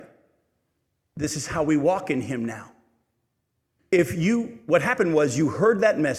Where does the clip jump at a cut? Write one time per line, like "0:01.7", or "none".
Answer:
0:03.8